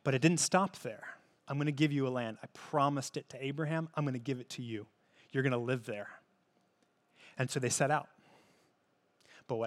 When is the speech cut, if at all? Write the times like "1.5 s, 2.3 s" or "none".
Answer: 1.4 s